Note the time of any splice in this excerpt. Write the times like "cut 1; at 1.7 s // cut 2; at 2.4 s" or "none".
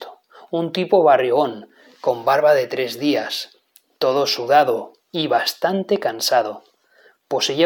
none